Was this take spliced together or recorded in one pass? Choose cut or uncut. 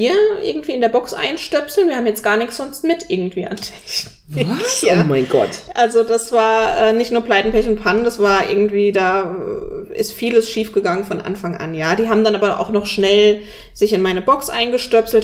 uncut